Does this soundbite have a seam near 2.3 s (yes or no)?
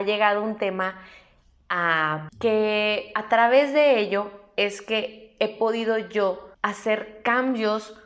yes